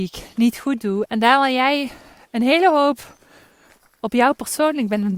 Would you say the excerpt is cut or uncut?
cut